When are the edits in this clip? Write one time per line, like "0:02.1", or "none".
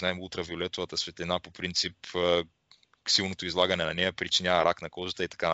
none